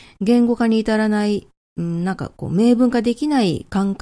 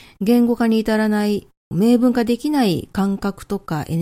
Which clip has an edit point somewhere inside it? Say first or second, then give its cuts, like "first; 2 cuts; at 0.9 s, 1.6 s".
second; 1 cut; at 1.7 s